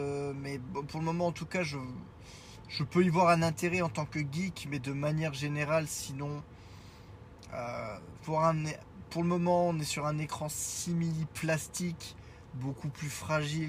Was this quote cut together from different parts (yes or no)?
no